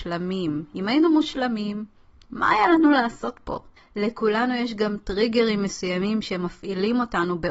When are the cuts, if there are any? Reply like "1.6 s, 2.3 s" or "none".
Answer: 3.8 s